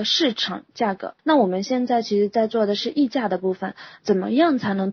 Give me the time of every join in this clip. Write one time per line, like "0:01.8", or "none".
0:01.2

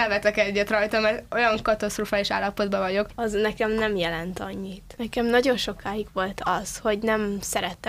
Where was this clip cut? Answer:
0:03.1
0:05.0

